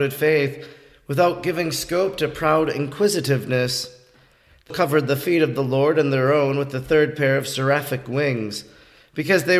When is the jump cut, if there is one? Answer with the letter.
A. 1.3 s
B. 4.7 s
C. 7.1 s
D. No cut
B